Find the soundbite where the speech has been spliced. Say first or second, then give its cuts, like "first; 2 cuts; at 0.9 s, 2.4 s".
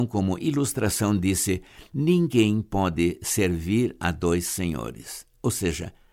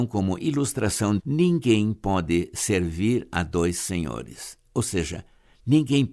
second; 1 cut; at 1.2 s